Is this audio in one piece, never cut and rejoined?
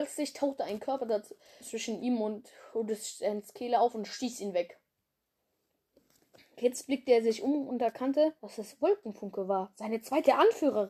no; 2 cuts; at 1.6 s, 8.4 s

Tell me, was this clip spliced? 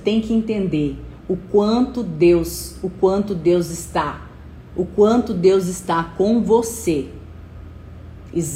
no; 0 cuts

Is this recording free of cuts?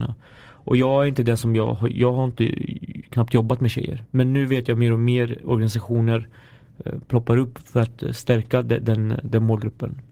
no; 1 cut; at 4.1 s

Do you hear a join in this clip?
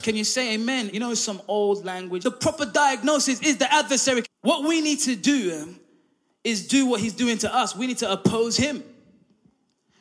yes; 3 cuts; at 0.9 s, 2.2 s, 4.2 s

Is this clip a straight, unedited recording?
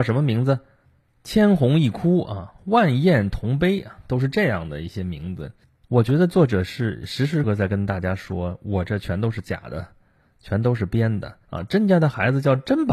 no; 2 cuts; at 7.4 s, 11.5 s

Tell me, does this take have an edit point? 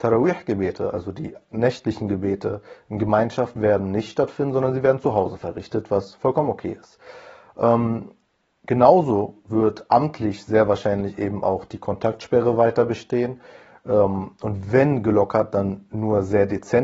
no; 0 cuts

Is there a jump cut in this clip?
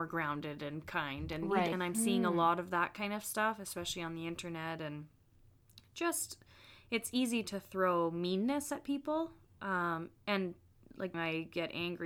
yes; 2 cuts; at 1.7 s, 11.1 s

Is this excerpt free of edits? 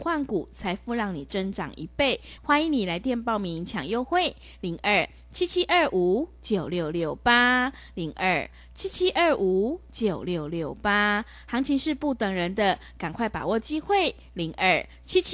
no; 1 cut; at 2.4 s

